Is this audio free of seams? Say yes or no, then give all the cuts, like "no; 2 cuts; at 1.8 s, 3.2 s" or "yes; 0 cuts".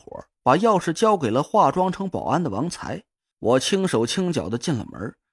no; 1 cut; at 3.3 s